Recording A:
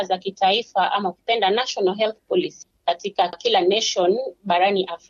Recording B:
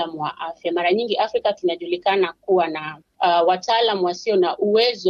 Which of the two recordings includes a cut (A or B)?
A